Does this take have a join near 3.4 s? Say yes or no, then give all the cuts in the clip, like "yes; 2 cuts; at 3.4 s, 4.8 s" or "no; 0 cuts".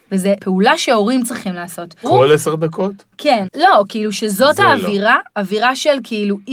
yes; 2 cuts; at 2.0 s, 3.4 s